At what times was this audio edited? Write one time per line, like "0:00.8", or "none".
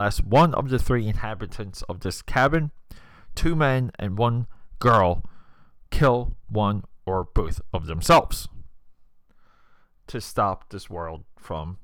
none